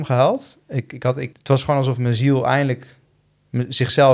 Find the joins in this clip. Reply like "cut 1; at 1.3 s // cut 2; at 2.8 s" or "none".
cut 1; at 1.3 s